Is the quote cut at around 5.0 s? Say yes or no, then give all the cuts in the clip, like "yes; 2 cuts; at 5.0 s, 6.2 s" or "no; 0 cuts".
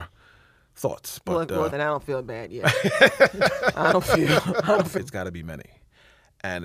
yes; 2 cuts; at 1.7 s, 5.0 s